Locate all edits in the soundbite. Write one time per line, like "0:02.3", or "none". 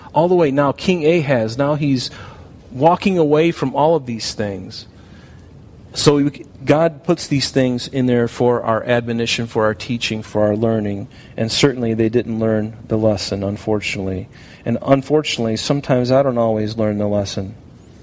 none